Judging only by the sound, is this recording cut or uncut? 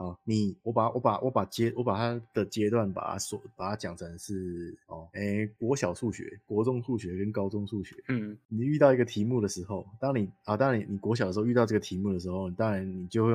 uncut